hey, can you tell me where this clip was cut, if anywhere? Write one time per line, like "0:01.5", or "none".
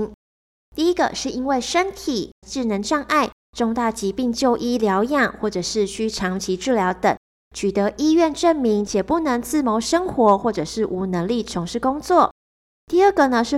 0:02.4